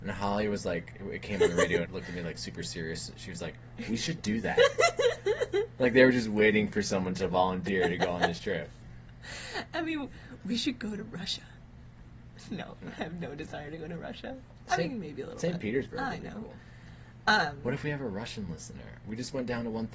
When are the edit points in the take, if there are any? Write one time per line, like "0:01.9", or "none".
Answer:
0:01.8